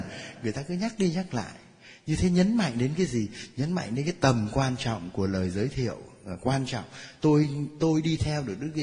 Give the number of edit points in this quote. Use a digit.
0